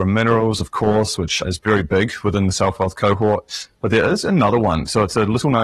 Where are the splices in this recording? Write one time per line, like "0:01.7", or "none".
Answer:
none